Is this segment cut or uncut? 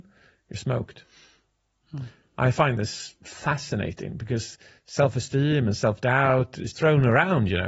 cut